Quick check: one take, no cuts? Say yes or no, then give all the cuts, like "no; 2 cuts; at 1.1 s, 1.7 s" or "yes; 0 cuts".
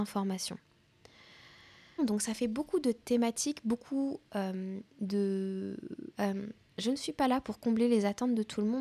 no; 3 cuts; at 2.0 s, 4.9 s, 6.1 s